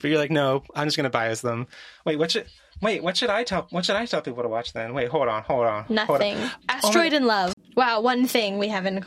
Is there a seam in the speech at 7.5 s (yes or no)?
yes